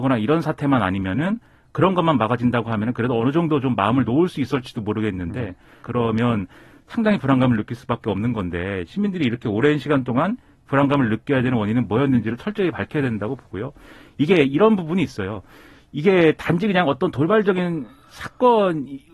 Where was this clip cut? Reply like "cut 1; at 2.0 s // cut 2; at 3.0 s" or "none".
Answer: cut 1; at 5.8 s